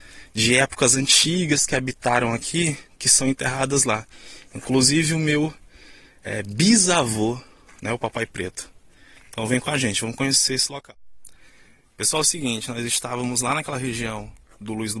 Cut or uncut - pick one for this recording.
uncut